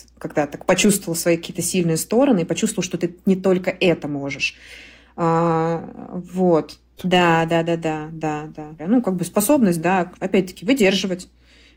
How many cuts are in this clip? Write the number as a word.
three